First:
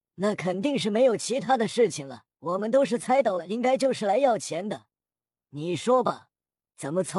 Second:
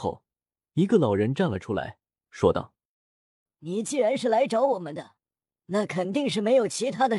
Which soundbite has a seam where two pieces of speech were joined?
first; 1 cut; at 2.3 s

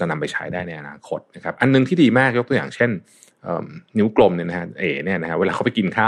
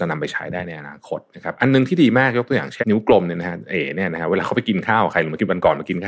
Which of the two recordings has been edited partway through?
second; 1 cut; at 2.8 s

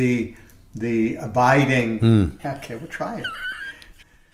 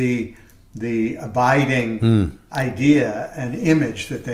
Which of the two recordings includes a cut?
first; 1 cut; at 2.4 s

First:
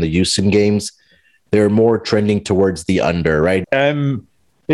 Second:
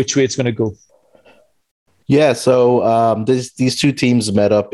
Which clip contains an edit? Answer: first; 1 cut; at 3.6 s

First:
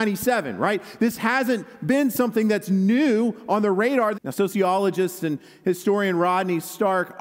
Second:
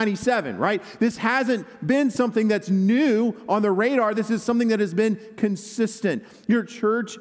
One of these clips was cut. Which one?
first; 1 cut; at 4.1 s

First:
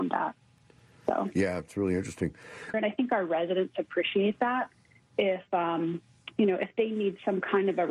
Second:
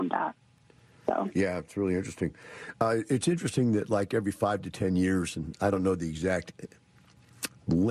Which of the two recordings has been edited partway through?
first; 1 cut; at 2.7 s

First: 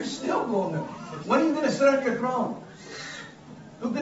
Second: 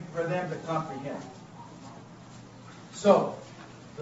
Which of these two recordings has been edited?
first; 1 cut; at 1.2 s

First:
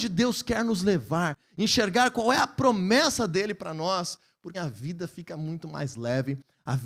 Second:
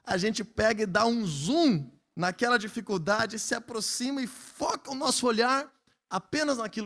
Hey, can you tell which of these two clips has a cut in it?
first; 1 cut; at 4.5 s

